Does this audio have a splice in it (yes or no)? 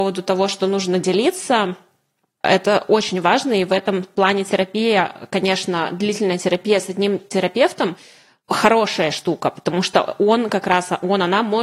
no